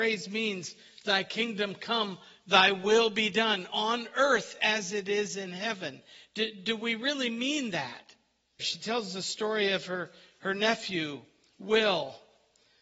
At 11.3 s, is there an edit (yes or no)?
no